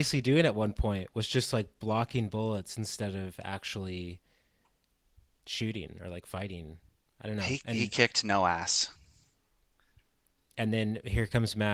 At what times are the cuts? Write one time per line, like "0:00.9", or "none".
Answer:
none